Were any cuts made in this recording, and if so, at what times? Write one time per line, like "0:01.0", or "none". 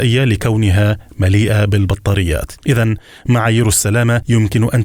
0:02.6